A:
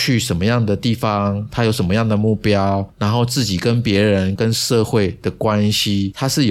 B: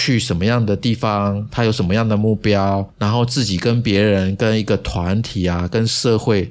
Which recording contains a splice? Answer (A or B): A